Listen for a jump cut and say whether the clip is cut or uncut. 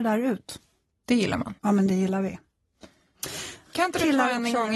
cut